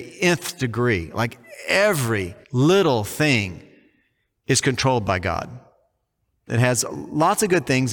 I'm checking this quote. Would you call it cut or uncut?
cut